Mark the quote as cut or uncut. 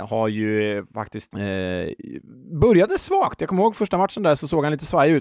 cut